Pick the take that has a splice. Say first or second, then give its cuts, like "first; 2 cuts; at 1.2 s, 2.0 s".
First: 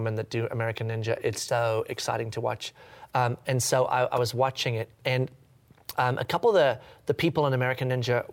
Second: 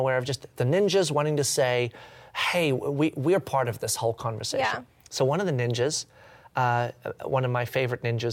first; 1 cut; at 1.5 s